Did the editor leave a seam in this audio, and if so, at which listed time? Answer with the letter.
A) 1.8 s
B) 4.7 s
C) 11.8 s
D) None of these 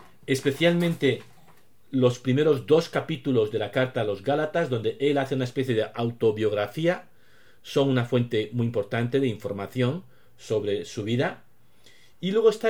D